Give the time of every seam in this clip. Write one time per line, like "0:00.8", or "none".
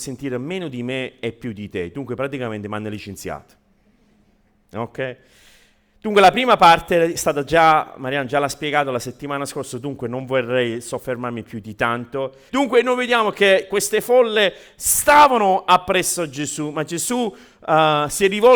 0:12.5